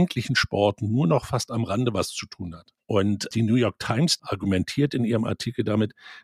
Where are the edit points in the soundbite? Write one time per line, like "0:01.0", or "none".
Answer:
none